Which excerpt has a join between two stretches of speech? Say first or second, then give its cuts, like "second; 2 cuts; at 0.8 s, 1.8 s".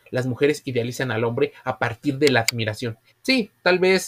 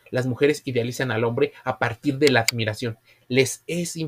first; 1 cut; at 3.1 s